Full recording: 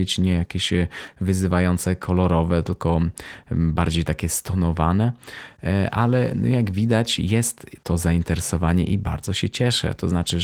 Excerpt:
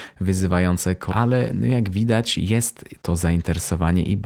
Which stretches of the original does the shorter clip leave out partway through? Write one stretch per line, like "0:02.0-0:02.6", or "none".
0:02.1-0:05.9